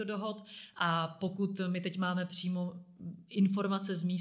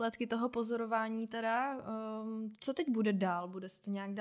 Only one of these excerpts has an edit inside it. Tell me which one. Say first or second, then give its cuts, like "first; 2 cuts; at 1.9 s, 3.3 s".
second; 1 cut; at 2.5 s